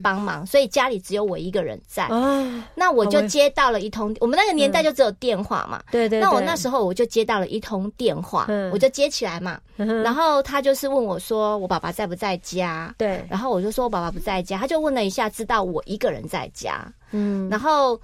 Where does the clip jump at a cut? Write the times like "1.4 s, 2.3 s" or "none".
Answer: none